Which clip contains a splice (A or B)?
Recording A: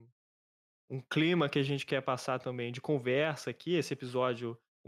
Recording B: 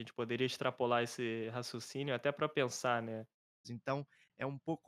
B